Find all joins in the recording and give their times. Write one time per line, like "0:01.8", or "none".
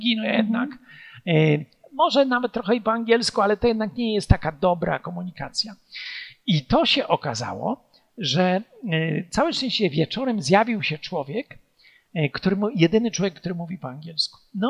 none